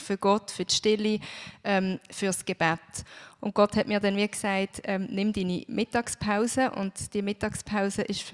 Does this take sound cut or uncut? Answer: cut